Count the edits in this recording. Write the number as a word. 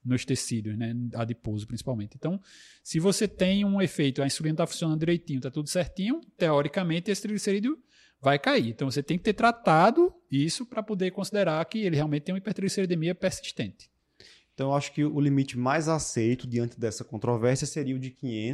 zero